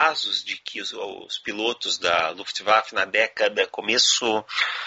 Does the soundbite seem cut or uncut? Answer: uncut